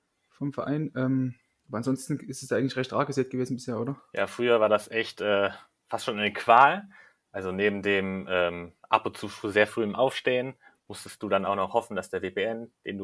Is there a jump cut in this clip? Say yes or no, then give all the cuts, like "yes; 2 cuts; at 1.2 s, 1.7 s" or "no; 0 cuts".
no; 0 cuts